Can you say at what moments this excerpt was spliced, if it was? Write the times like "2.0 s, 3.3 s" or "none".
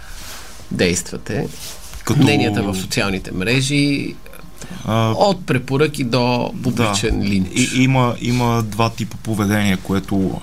none